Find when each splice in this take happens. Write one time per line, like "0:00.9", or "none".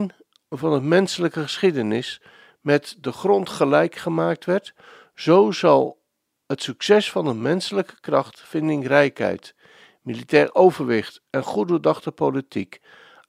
none